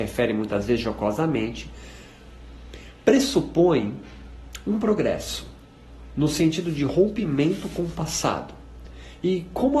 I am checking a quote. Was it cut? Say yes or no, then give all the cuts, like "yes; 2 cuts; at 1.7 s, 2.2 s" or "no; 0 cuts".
no; 0 cuts